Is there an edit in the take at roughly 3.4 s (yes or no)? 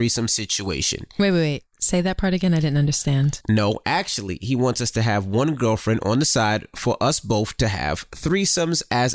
yes